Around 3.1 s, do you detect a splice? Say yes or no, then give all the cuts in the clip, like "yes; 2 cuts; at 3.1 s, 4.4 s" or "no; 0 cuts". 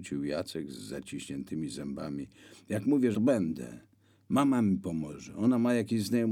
yes; 1 cut; at 3.1 s